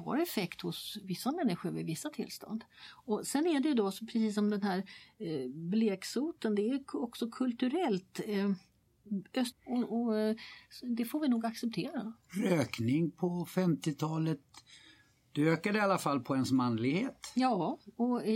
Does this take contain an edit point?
yes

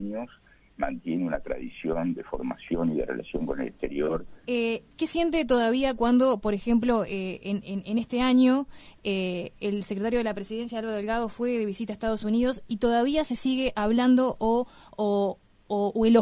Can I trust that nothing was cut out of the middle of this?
no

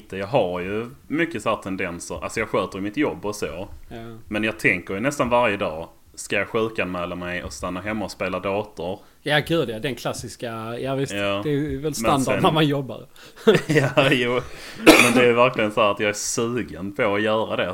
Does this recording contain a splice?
no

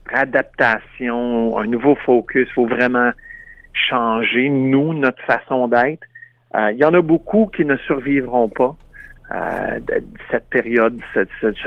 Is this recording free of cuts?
yes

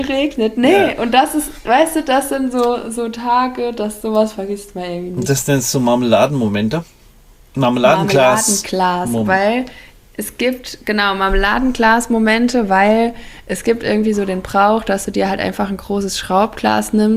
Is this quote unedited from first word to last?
yes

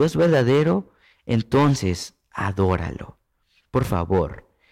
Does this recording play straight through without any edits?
yes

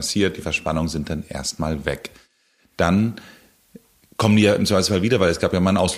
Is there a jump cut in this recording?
no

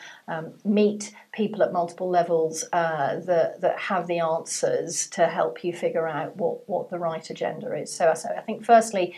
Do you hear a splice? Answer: no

